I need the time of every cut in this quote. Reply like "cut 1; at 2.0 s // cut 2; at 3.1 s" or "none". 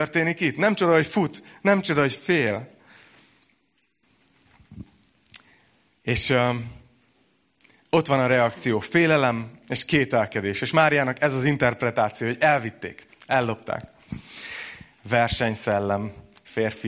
cut 1; at 14.9 s